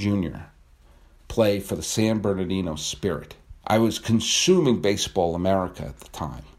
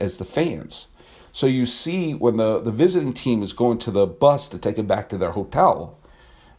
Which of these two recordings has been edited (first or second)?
first